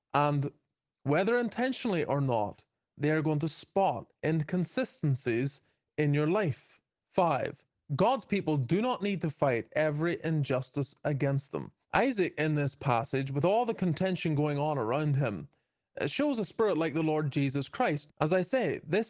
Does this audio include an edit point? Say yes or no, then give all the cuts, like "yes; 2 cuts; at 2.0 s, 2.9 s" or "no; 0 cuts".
yes; 3 cuts; at 7.0 s, 11.8 s, 18.1 s